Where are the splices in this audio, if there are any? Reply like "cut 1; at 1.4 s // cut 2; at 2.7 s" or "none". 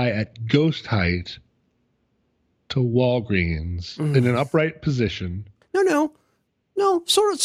none